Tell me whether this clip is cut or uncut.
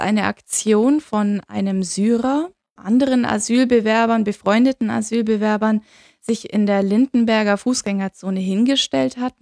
cut